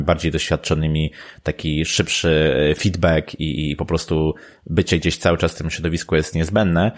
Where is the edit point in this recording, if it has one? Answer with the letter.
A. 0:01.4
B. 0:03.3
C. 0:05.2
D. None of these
D